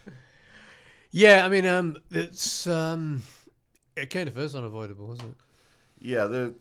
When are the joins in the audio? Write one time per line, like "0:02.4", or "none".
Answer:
none

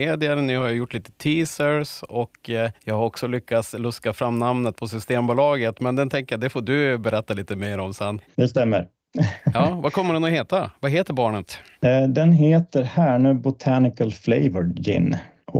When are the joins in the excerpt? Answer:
0:08.3

